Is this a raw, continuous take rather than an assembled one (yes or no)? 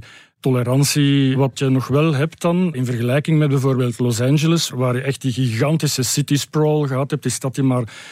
no